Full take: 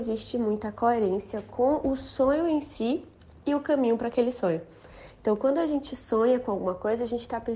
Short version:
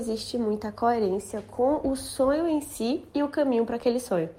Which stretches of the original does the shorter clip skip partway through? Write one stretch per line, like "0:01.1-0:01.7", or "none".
0:03.1-0:03.4